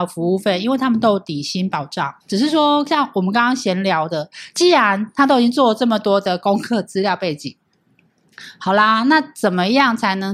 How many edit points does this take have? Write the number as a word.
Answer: one